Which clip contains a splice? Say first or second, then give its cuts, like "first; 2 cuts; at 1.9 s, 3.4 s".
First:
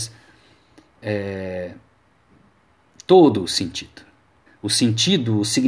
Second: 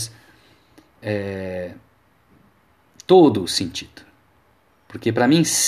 first; 1 cut; at 4.5 s